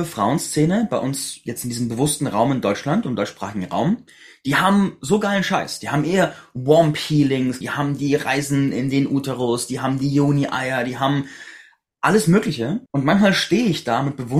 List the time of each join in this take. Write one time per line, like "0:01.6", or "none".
0:07.6
0:12.9